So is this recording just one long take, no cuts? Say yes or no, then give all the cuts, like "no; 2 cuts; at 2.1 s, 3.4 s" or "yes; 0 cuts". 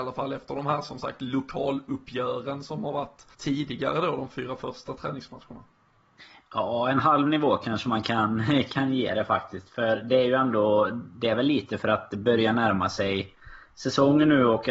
no; 1 cut; at 3.3 s